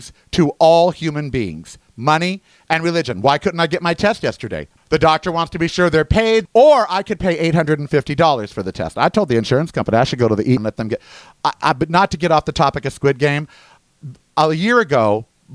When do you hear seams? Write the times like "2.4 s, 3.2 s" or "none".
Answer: 4.8 s, 6.5 s, 10.6 s